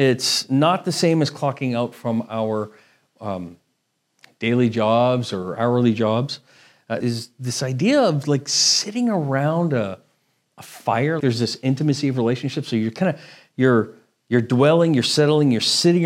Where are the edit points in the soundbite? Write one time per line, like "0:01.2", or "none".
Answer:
0:07.0
0:11.2